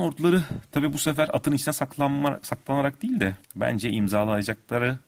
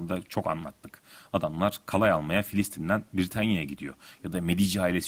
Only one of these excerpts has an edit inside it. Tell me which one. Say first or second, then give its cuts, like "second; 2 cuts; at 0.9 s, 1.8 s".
first; 1 cut; at 3.4 s